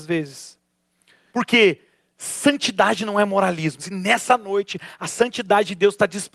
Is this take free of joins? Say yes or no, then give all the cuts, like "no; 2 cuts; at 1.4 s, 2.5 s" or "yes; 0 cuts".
no; 2 cuts; at 1.3 s, 3.8 s